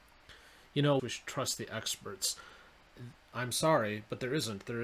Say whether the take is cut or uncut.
cut